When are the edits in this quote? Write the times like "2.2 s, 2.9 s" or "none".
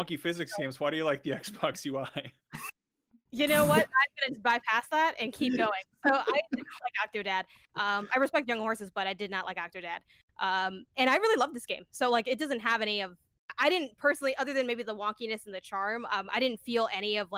none